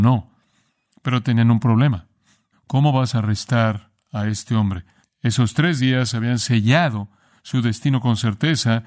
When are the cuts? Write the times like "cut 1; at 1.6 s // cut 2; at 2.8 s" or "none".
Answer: cut 1; at 2.5 s // cut 2; at 5.0 s